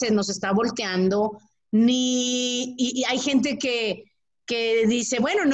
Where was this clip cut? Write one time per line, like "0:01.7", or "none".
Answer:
none